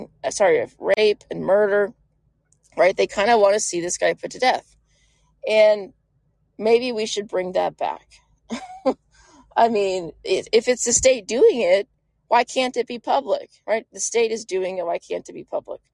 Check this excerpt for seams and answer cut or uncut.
uncut